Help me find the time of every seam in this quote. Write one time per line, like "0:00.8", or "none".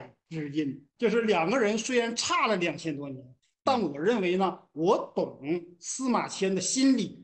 0:01.0